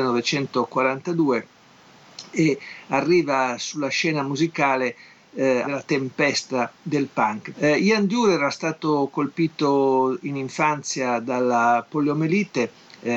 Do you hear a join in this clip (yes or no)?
yes